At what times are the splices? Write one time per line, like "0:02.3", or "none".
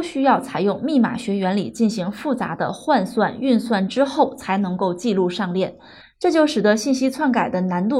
0:06.0